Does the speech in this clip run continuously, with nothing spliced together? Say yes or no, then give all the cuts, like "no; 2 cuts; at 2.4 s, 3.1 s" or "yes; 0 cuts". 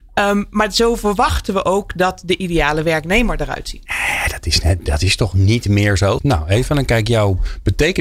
no; 2 cuts; at 3.9 s, 6.2 s